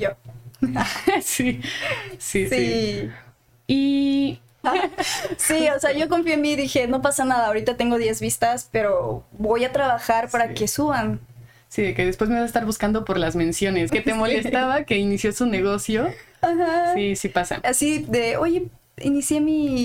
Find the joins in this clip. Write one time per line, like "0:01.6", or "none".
0:04.6
0:13.9